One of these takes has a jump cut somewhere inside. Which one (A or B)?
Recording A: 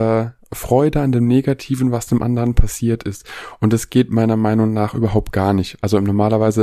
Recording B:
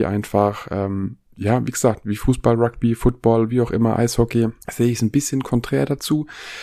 B